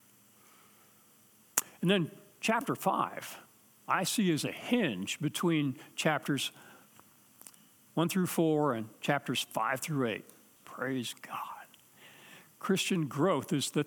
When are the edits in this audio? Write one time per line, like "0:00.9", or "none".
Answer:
0:10.6